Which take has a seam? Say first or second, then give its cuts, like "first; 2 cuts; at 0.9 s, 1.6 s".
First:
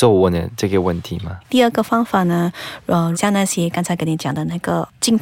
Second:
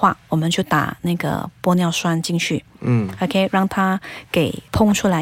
first; 2 cuts; at 1.4 s, 3.1 s